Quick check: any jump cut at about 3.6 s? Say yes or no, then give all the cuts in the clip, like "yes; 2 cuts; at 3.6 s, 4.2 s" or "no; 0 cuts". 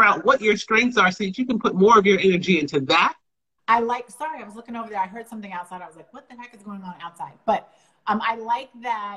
yes; 1 cut; at 3.6 s